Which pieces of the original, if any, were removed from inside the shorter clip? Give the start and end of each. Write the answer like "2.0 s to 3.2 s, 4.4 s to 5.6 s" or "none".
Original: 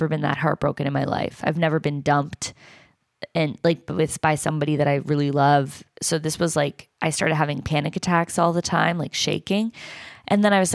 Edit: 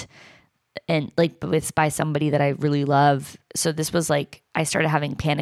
none